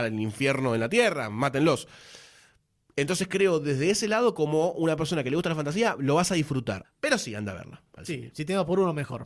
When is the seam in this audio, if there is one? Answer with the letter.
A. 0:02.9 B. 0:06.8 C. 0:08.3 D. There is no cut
B